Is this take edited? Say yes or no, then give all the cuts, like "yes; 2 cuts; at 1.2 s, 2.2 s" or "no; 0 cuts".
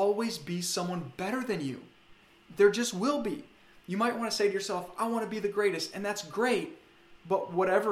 no; 0 cuts